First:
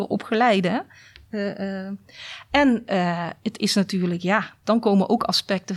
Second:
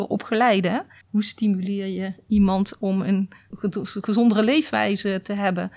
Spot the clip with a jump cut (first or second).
second